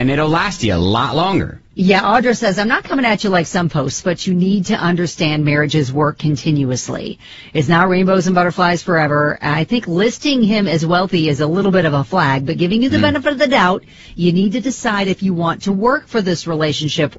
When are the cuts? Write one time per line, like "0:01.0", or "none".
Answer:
none

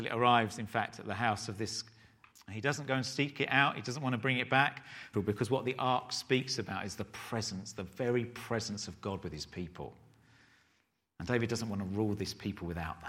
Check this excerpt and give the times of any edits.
0:02.3
0:05.1

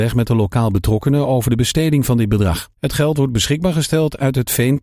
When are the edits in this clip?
0:02.7

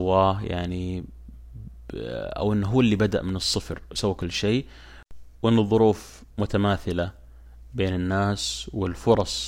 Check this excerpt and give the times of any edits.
0:06.3

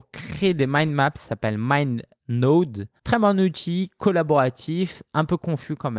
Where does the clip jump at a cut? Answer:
0:03.0

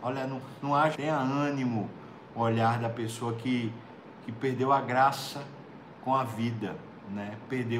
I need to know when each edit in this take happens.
0:00.9
0:02.3

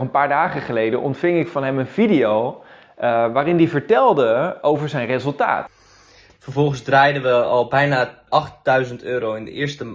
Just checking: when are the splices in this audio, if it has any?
0:06.3
0:08.3

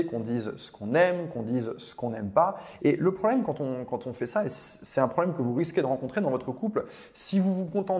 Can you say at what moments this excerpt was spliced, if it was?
0:02.8

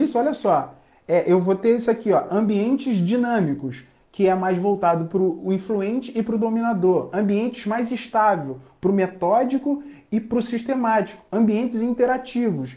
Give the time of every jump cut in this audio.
none

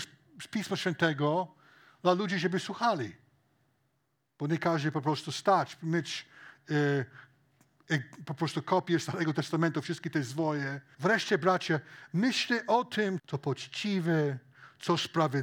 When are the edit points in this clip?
0:10.9
0:13.2

